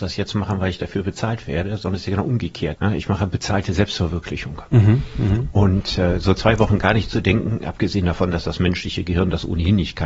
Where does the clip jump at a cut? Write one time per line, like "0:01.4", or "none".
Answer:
0:02.8